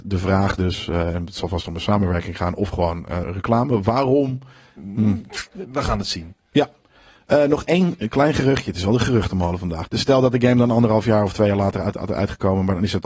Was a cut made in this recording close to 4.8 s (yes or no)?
yes